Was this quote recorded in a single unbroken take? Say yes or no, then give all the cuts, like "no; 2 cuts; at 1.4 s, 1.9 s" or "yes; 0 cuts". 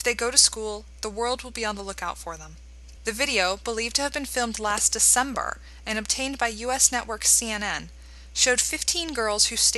no; 1 cut; at 3.0 s